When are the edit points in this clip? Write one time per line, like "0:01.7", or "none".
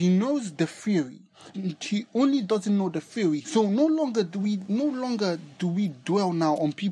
0:01.5
0:03.4